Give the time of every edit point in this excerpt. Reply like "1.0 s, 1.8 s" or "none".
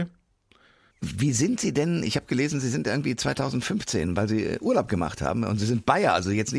0.9 s